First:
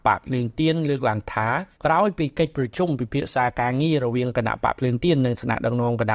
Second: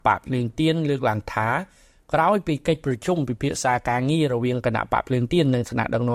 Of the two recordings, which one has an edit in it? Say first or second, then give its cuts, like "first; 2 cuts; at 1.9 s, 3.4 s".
first; 1 cut; at 1.7 s